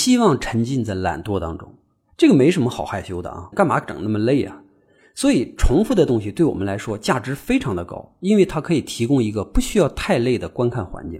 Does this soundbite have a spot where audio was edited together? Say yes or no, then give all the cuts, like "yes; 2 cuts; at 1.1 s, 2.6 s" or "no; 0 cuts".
yes; 1 cut; at 3.5 s